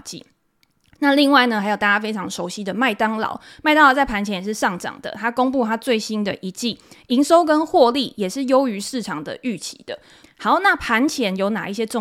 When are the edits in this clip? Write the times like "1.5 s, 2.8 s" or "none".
10.2 s